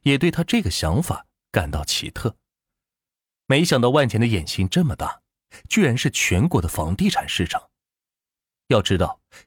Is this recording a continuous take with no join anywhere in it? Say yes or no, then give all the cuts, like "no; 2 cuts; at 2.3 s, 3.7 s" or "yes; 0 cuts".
yes; 0 cuts